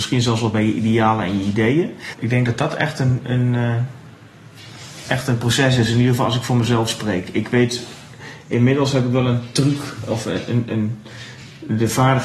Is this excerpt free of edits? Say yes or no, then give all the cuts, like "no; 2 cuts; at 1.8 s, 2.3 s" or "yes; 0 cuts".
no; 1 cut; at 2.1 s